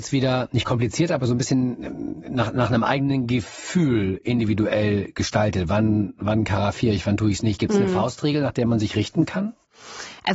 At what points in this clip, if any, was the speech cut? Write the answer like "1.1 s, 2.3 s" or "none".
none